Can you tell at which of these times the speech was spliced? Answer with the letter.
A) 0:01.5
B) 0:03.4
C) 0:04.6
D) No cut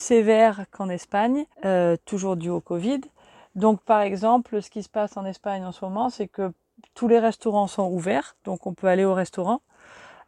A